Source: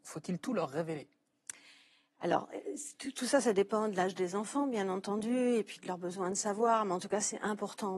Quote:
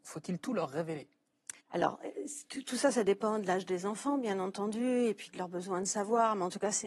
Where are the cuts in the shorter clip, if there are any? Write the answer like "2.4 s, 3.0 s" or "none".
1.6 s